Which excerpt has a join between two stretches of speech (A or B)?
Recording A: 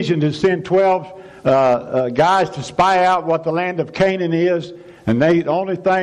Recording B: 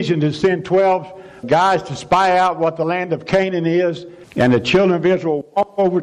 B